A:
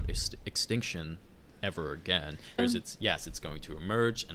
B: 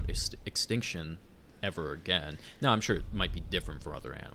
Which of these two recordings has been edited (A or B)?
A